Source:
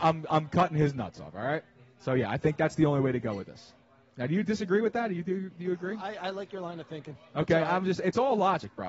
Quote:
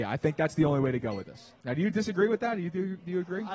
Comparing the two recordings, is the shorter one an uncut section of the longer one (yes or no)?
no